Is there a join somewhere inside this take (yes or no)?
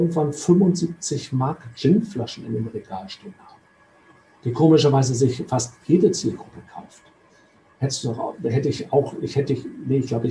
no